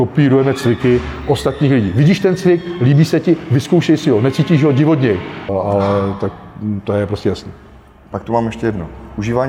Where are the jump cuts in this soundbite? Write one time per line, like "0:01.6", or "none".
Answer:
0:05.5